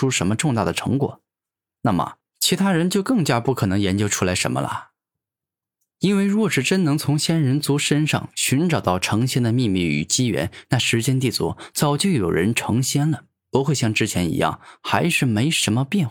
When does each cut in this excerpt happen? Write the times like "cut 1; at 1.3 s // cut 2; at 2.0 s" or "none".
cut 1; at 5.9 s